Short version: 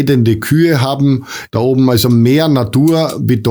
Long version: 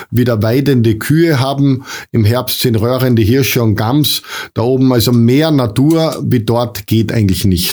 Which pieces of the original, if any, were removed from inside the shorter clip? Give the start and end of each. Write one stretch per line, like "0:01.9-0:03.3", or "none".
0:02.1-0:04.5

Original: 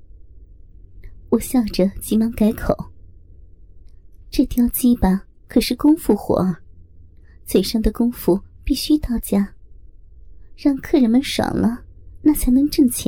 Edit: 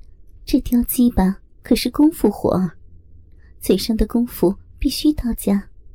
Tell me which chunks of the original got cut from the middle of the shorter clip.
none

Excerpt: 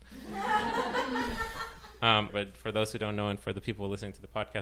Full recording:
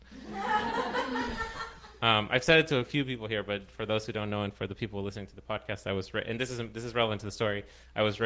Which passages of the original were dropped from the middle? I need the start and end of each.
0:02.3-0:03.4

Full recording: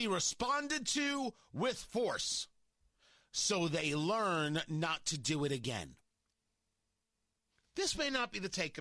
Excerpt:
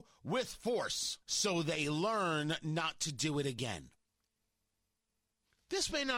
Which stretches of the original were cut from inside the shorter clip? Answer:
0:02.5-0:03.3

